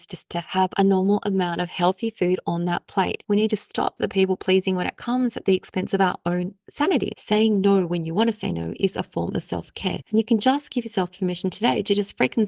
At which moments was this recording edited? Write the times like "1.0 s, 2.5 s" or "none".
3.2 s, 7.1 s, 10.0 s